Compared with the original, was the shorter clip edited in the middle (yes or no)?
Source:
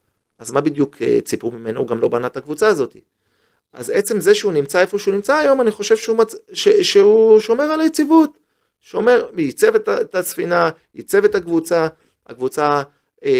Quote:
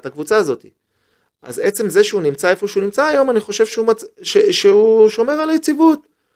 no